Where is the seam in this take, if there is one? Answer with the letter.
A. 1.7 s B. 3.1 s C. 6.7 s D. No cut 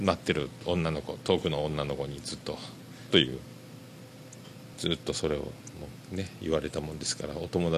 B